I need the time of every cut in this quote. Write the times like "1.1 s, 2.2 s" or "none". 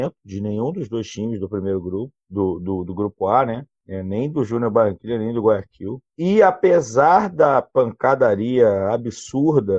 6.1 s